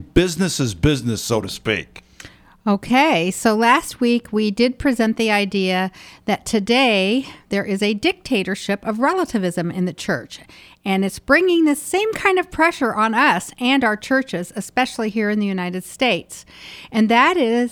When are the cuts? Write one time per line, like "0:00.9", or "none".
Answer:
none